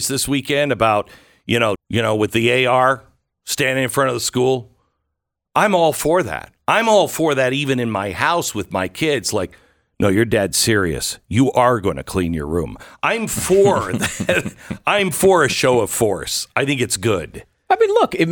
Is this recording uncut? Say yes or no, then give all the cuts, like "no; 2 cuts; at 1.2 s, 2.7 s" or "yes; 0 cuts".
no; 1 cut; at 1.8 s